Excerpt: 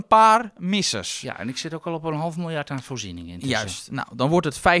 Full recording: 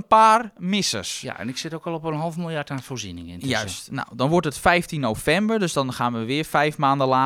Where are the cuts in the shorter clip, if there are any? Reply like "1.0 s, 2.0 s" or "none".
none